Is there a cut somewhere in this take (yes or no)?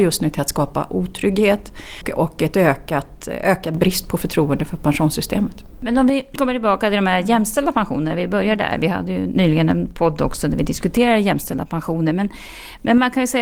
no